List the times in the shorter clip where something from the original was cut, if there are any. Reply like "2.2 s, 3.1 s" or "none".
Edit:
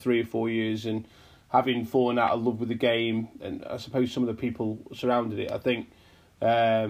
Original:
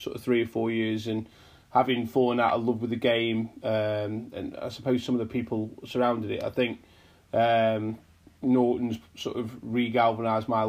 3.4 s